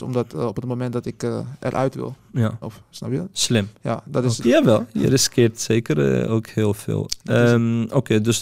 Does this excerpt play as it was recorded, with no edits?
no; 2 cuts; at 2.6 s, 4.4 s

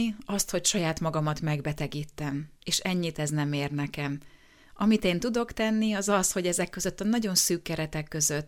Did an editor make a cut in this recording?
yes; 1 cut; at 2.6 s

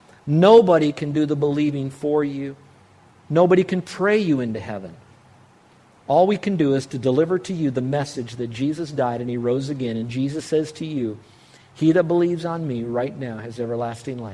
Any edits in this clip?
no; 0 cuts

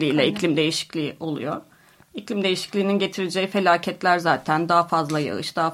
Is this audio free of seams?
yes; 0 cuts

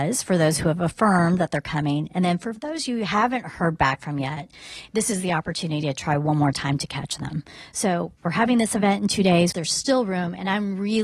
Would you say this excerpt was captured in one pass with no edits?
no; 1 cut; at 9.5 s

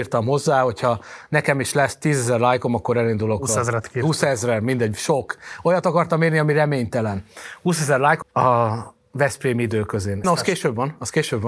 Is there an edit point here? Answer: yes; 2 cuts; at 8.2 s, 10.2 s

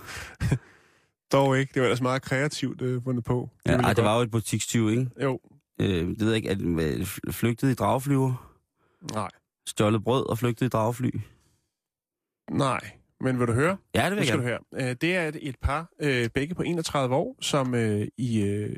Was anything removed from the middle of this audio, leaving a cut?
no; 0 cuts

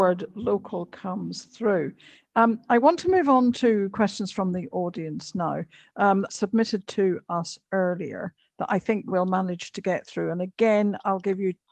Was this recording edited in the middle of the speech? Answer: yes; 1 cut; at 6.3 s

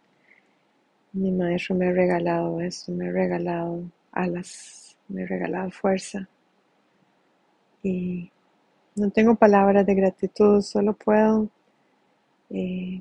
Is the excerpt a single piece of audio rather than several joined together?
yes; 0 cuts

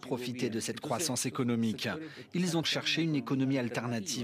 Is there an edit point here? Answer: yes; 1 cut; at 2.6 s

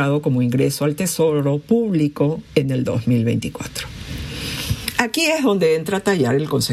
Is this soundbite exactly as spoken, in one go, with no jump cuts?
yes; 0 cuts

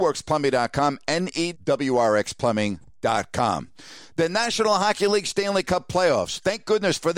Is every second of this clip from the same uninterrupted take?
no; 1 cut; at 1.5 s

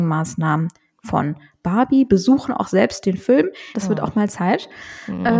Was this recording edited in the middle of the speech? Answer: yes; 1 cut; at 3.7 s

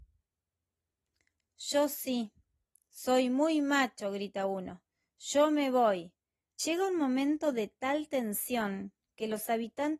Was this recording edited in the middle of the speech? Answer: yes; 1 cut; at 6.6 s

